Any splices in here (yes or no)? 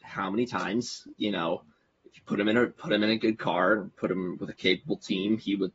no